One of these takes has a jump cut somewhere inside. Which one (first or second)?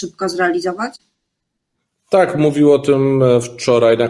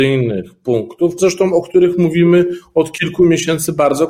second